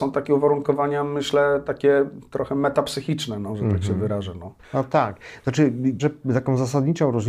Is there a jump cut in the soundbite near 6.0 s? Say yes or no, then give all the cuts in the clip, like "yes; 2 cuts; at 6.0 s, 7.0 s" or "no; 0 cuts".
yes; 2 cuts; at 4.6 s, 6.0 s